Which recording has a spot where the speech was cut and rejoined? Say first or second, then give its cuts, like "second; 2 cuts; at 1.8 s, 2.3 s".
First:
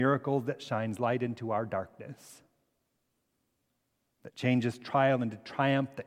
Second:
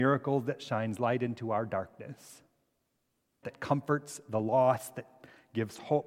second; 1 cut; at 3.4 s